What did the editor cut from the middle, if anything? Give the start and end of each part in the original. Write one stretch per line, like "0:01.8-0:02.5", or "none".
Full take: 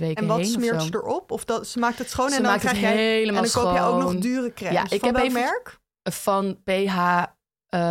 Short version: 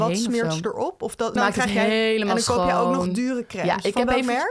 0:01.6-0:02.4